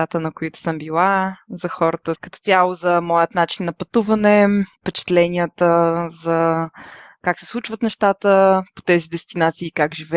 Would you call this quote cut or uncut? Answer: cut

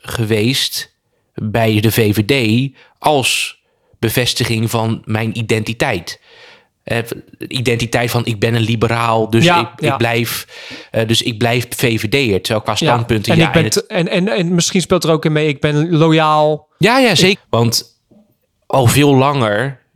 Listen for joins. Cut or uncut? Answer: cut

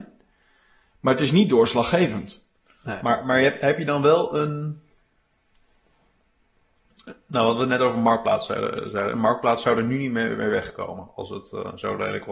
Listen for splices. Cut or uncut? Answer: uncut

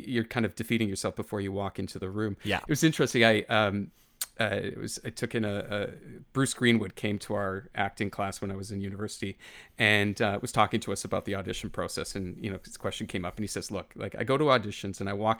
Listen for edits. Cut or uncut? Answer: uncut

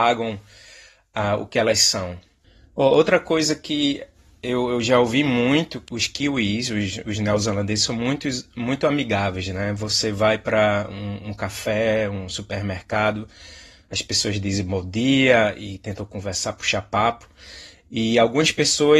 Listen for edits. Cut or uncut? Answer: uncut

